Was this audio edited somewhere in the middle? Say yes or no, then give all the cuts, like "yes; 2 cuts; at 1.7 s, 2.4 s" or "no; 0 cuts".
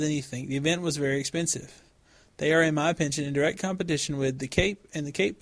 no; 0 cuts